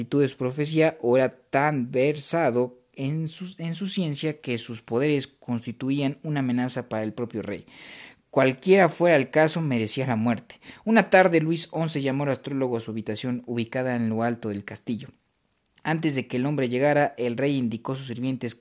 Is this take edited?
no; 0 cuts

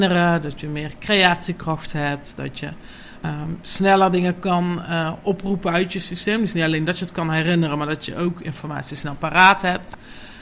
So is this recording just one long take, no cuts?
yes; 0 cuts

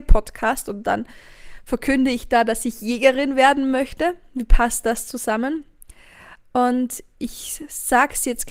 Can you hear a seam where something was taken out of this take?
no; 0 cuts

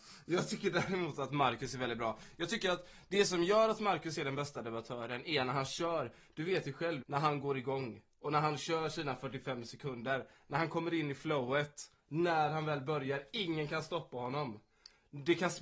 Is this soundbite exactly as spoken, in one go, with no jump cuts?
no; 1 cut; at 7.0 s

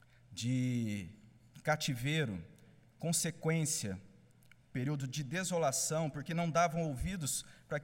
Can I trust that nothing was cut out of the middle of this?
yes; 0 cuts

